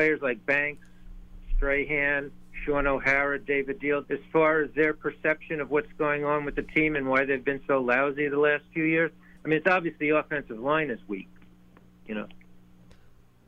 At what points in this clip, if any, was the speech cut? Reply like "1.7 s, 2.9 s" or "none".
4.0 s